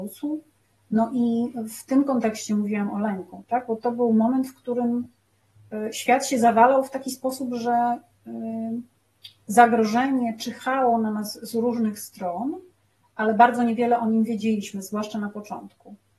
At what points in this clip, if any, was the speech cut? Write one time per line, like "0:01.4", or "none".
none